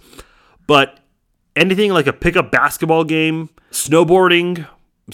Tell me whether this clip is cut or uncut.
cut